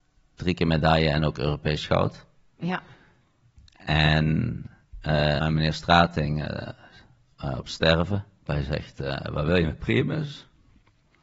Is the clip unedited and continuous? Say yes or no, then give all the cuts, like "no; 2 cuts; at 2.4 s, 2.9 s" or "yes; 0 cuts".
no; 2 cuts; at 5.4 s, 8.5 s